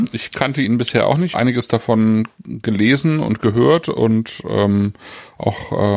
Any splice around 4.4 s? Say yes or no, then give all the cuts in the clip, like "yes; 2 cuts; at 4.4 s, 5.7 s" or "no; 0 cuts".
no; 1 cut; at 1.3 s